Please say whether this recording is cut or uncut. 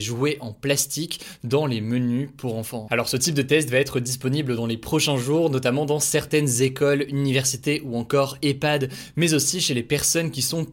cut